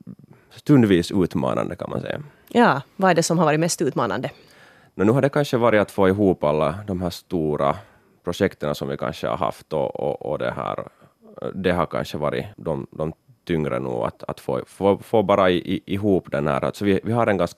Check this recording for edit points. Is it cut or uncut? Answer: cut